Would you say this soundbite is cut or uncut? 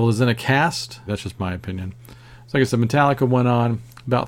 cut